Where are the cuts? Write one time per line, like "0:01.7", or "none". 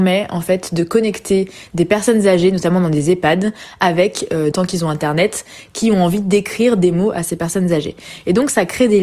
0:04.5